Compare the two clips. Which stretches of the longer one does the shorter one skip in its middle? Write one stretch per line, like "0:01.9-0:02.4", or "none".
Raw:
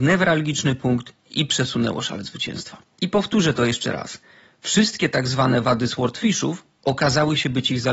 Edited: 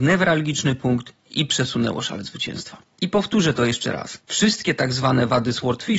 0:04.2-0:04.6